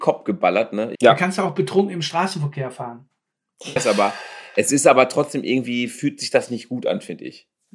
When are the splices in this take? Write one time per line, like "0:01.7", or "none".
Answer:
0:00.9
0:03.8

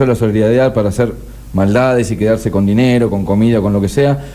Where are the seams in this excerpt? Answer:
none

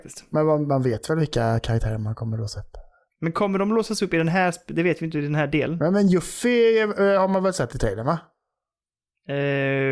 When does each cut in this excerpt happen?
none

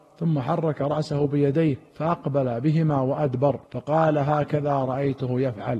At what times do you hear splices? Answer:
0:01.9
0:03.7

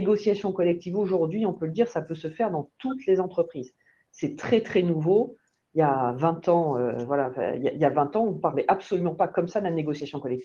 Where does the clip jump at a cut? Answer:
none

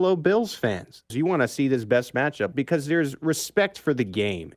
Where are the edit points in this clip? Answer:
0:01.1
0:02.5

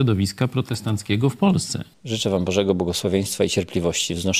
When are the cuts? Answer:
0:01.9

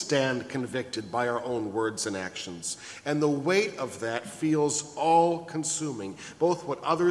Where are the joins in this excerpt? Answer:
none

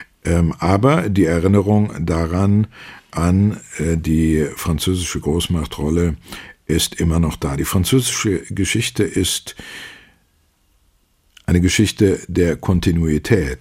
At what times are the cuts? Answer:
none

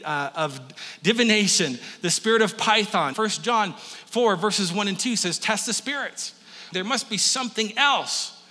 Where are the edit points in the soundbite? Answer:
0:03.1
0:06.7

